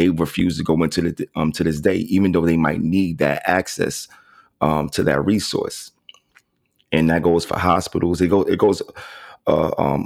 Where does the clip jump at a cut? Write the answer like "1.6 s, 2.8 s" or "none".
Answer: none